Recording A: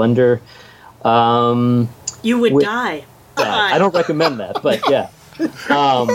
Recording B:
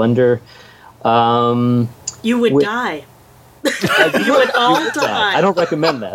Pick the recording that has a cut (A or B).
A